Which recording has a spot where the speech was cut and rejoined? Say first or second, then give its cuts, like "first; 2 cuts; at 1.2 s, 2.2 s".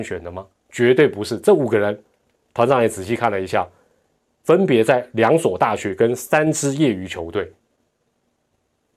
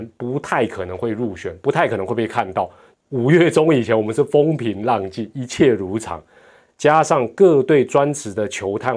second; 1 cut; at 2.9 s